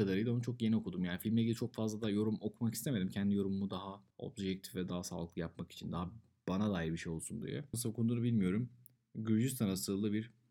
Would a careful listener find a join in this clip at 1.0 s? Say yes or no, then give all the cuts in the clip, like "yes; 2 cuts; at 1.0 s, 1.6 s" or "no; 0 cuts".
no; 1 cut; at 7.7 s